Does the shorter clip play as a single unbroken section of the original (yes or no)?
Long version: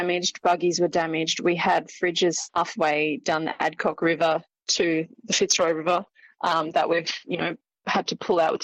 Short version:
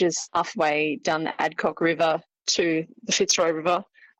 yes